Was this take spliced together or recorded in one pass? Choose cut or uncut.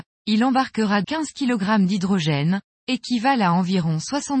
cut